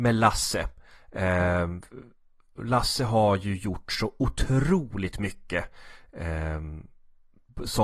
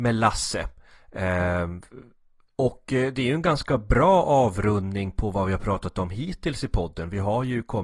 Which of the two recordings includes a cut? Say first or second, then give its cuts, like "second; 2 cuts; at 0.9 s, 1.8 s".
second; 1 cut; at 2.4 s